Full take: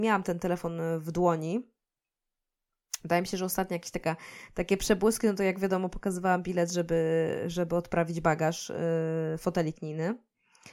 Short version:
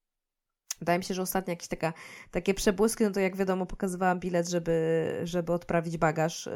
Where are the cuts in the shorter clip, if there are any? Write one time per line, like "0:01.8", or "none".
none